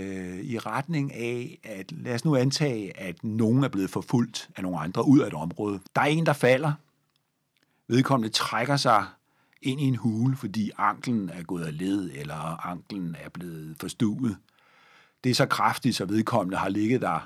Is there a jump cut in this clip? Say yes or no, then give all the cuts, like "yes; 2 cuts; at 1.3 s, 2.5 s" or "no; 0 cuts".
yes; 1 cut; at 5.9 s